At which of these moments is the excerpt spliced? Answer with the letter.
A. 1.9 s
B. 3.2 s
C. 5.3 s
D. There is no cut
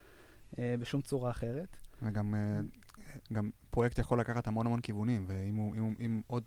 B